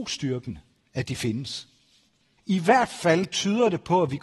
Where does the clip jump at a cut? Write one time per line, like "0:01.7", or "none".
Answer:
0:02.4